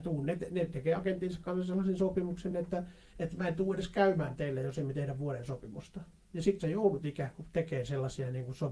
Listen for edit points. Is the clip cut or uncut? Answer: uncut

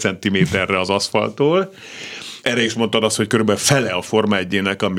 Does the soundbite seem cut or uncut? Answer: cut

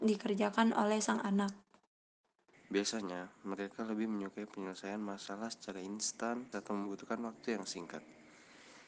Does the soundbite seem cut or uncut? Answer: cut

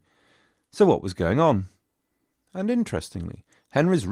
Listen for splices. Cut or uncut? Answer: cut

